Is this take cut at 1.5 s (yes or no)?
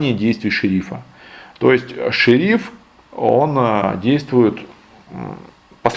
no